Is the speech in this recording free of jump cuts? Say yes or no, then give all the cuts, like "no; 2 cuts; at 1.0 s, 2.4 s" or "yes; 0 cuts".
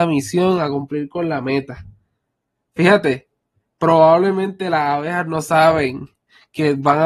yes; 0 cuts